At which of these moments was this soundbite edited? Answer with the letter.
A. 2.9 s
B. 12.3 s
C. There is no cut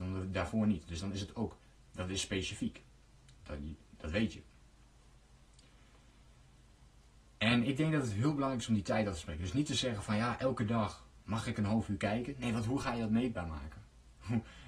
C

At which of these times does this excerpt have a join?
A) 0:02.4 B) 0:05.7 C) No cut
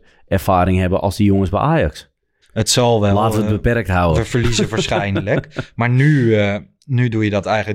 A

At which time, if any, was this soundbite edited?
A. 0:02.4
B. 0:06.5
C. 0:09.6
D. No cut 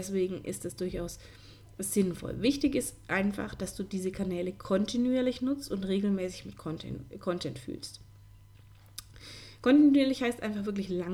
D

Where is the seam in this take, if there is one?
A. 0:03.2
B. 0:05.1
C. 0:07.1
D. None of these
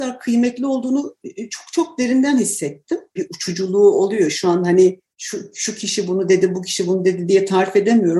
A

